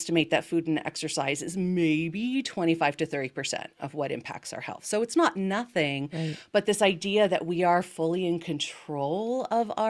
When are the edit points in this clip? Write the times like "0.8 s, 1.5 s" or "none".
none